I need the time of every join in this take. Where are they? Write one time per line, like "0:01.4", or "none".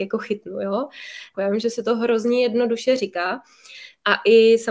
0:01.3